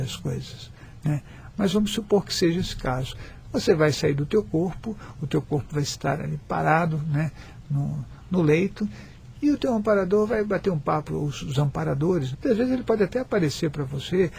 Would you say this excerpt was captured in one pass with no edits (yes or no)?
no